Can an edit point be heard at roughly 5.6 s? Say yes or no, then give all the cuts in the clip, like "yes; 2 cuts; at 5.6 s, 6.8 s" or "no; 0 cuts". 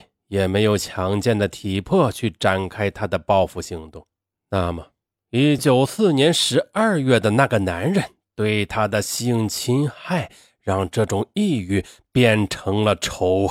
yes; 2 cuts; at 4.3 s, 5.6 s